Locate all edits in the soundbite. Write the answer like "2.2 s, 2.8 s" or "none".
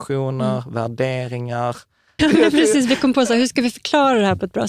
2.2 s